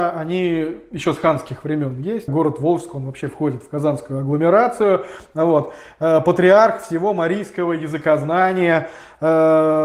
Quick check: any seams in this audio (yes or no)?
yes